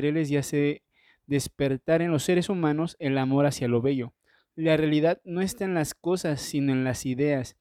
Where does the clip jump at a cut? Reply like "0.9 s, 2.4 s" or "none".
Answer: none